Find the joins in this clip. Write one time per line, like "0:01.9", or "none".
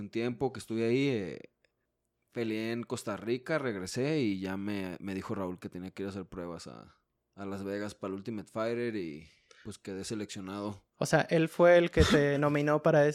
none